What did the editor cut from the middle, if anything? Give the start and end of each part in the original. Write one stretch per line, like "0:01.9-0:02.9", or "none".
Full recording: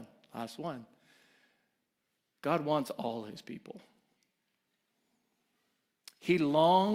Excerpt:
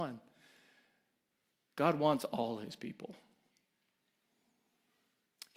none

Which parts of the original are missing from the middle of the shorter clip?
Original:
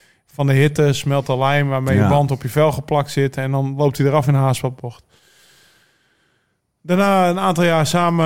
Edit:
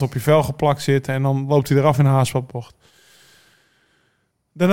none

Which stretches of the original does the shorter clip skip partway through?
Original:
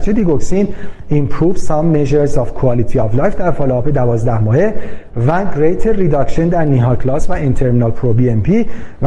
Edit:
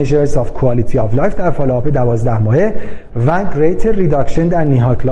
none

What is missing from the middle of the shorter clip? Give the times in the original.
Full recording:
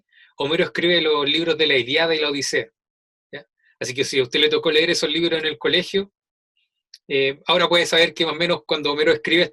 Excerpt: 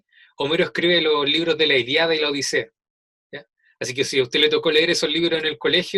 none

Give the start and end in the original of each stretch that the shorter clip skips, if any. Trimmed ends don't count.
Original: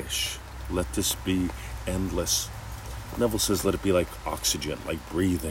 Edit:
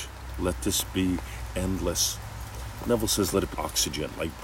0:03.8-0:04.2

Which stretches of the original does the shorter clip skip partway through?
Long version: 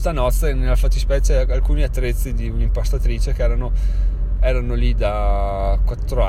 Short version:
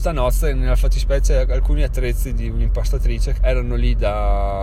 0:03.4-0:04.4

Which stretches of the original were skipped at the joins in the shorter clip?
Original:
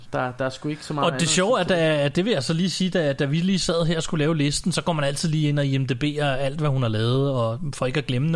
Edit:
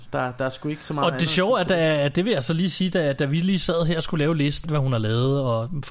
0:04.6-0:06.5

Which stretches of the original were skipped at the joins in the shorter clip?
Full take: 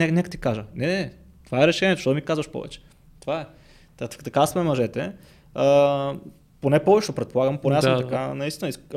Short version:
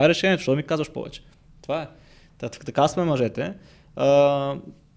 none

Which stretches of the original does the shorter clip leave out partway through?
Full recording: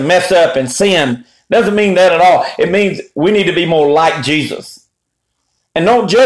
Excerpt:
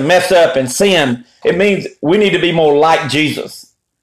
0:01.4-0:02.6

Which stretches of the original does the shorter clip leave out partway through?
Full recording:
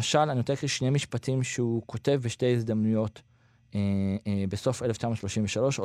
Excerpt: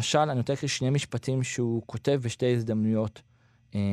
none

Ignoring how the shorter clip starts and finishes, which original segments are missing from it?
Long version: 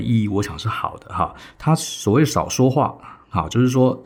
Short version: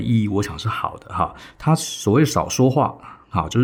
none

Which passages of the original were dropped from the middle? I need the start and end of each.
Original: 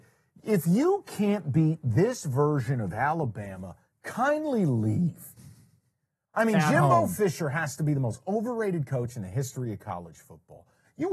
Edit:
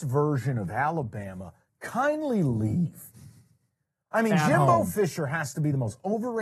none

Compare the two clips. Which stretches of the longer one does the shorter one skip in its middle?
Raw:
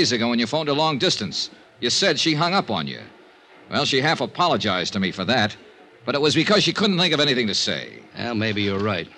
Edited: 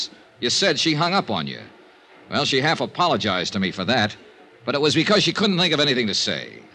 none

